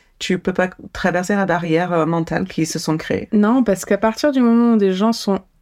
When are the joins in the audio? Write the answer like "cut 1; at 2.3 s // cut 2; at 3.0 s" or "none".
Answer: none